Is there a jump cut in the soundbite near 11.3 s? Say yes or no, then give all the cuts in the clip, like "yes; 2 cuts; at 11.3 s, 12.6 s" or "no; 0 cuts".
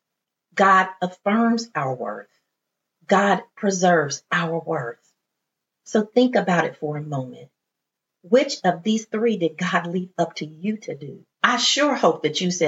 yes; 1 cut; at 11.3 s